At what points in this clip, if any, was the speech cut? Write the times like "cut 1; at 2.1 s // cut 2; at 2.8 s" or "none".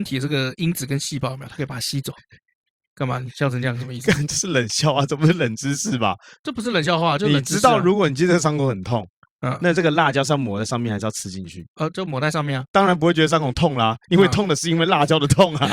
cut 1; at 12.7 s